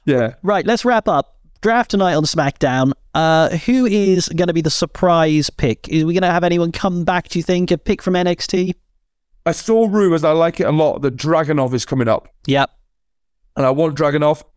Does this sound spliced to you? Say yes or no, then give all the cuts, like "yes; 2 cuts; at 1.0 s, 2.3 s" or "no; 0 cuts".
no; 0 cuts